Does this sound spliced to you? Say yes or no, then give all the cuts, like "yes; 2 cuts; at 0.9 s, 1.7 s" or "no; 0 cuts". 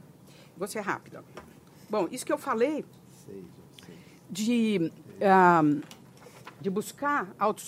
yes; 1 cut; at 6.6 s